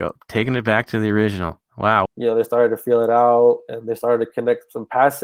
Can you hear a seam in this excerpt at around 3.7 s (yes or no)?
no